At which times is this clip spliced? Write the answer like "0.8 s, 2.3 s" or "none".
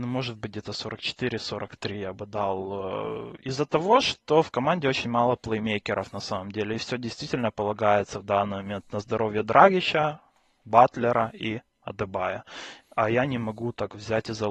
none

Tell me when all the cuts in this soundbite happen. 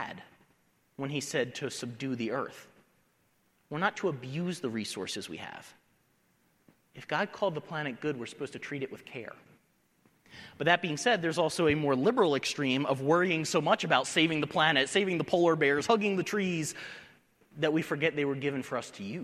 none

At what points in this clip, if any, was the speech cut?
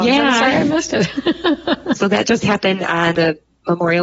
2.0 s

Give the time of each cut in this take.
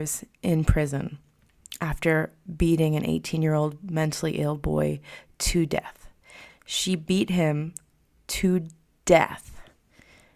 6.5 s

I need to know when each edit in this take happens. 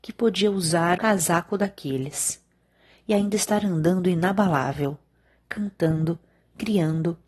1.0 s

